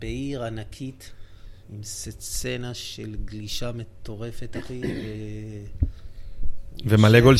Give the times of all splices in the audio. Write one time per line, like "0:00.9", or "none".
none

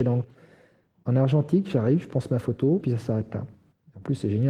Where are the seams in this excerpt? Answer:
0:02.8

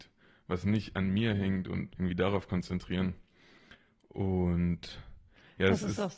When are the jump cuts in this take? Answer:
0:01.9

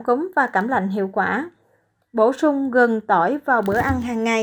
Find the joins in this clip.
0:02.0

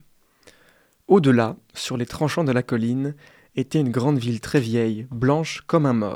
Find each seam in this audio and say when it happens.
none

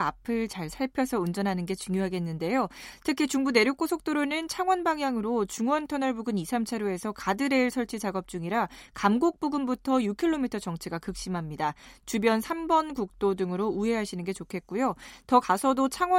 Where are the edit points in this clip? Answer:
none

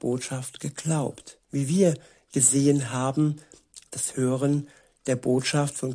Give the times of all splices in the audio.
0:01.4
0:03.9

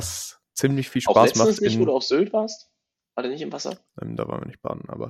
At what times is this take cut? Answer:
0:03.9

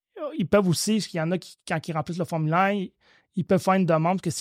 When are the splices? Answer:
none

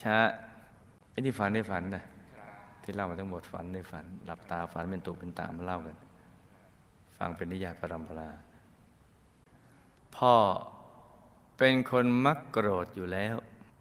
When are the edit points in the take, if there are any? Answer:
none

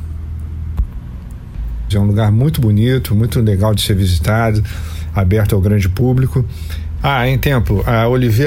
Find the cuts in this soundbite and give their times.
0:01.9
0:07.0

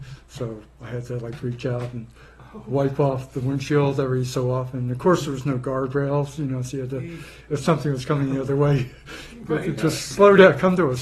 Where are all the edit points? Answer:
none

